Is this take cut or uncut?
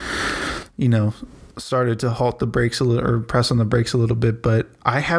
uncut